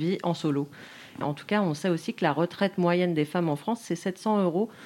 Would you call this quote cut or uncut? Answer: cut